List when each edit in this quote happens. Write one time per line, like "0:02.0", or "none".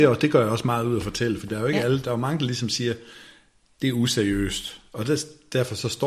none